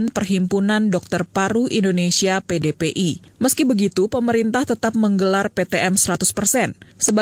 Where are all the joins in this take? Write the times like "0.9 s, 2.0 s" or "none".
3.4 s